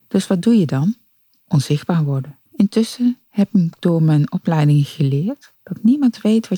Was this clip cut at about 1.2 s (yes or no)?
no